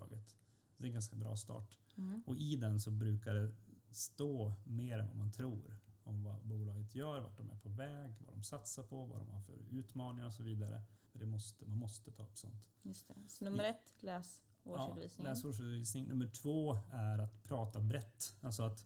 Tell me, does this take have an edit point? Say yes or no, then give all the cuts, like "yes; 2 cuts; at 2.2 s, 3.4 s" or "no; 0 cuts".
yes; 1 cut; at 11.1 s